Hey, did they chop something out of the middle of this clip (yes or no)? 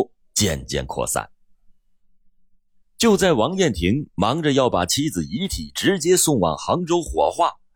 no